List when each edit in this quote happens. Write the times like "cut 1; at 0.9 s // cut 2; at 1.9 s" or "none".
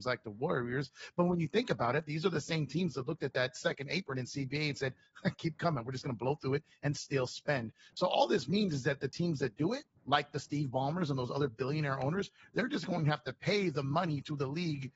none